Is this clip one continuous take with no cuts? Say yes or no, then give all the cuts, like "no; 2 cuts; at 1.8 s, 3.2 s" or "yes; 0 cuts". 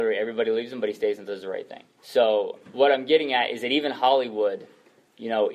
no; 1 cut; at 2.0 s